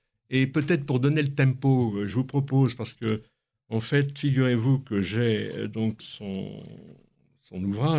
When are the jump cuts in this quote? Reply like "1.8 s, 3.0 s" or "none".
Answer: 6.0 s